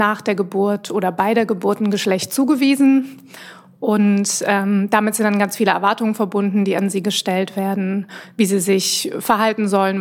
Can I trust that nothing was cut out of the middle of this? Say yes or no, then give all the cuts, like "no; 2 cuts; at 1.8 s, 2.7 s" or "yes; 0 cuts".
yes; 0 cuts